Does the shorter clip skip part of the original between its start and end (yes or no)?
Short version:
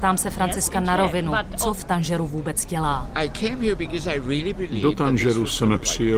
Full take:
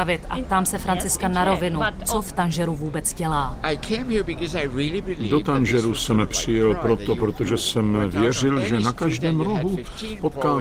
no